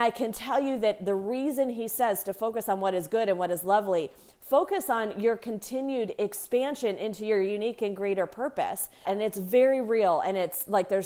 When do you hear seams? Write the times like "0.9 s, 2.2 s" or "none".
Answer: 9.1 s